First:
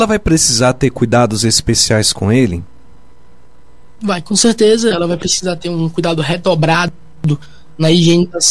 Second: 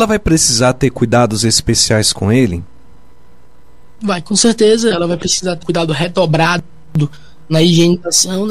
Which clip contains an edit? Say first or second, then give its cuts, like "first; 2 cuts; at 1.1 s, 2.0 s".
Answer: second; 1 cut; at 5.6 s